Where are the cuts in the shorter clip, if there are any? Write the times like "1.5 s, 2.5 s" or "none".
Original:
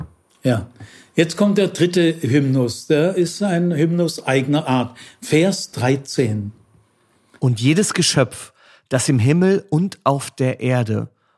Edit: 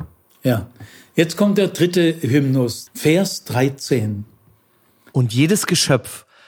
2.9 s

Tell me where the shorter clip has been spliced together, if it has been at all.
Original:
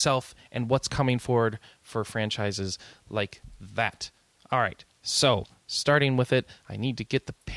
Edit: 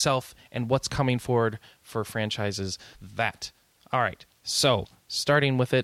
2.9 s

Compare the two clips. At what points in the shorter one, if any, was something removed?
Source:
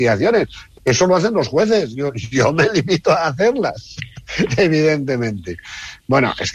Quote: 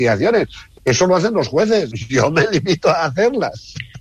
1.9 s

